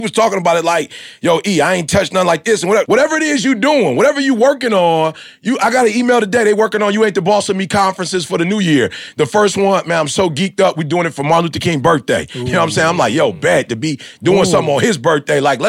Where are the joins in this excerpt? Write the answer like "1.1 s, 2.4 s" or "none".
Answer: 2.8 s